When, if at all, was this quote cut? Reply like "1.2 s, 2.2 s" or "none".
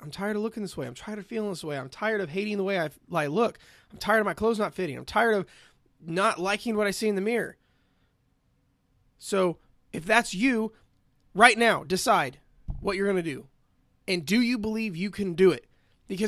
11.2 s